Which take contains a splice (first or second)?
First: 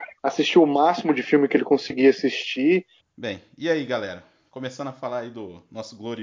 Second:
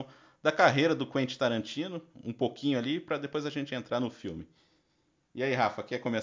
first